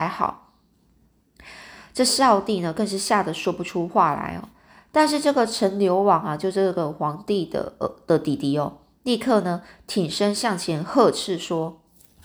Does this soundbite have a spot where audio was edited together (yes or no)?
no